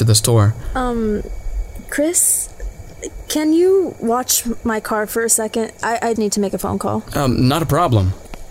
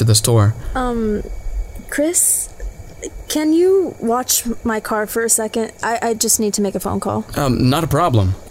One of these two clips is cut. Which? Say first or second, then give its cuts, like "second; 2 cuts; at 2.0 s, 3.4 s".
first; 1 cut; at 6.2 s